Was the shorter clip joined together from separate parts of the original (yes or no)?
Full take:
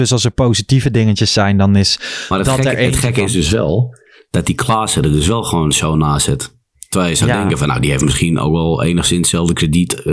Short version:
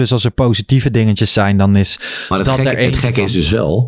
no